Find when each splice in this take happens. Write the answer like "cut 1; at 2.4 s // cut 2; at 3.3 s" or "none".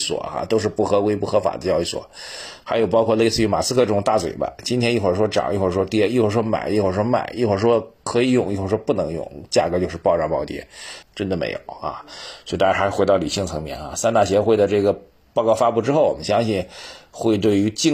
cut 1; at 11.0 s